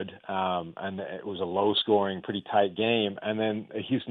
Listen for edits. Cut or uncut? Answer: uncut